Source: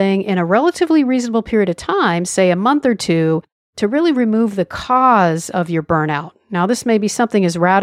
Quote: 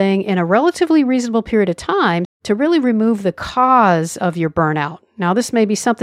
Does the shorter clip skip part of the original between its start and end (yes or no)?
yes